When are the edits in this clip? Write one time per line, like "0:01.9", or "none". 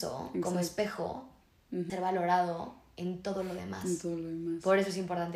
0:01.9

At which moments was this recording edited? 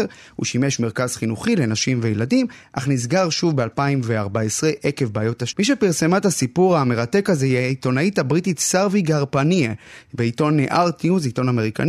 0:05.5

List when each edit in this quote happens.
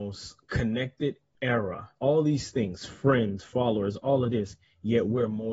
0:02.0

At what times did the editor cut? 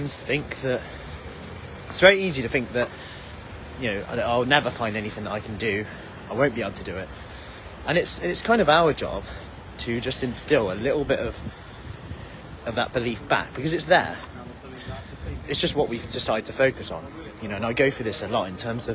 none

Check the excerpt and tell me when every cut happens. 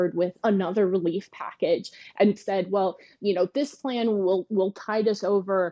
0:02.4

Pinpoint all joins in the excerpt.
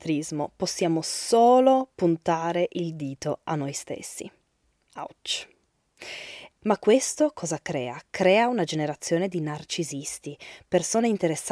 0:06.6

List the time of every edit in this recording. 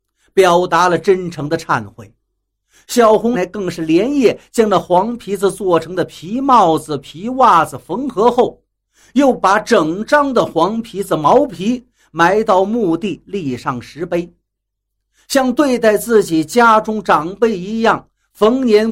0:03.3

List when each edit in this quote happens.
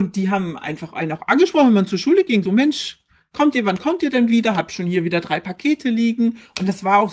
0:02.5

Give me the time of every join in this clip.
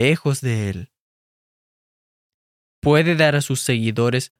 0:02.6

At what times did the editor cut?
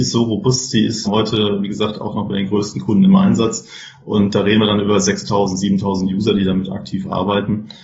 0:01.0

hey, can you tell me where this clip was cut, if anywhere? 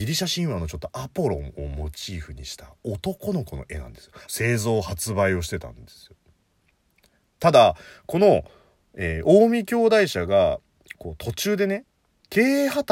0:04.3

